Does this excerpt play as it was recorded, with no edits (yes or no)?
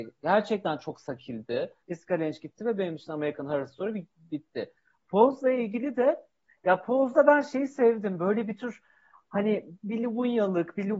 no